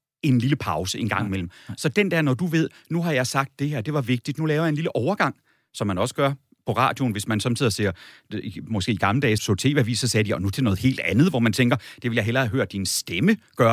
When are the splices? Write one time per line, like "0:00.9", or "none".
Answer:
0:09.4